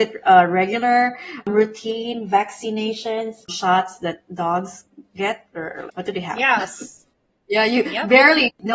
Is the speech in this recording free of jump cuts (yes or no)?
no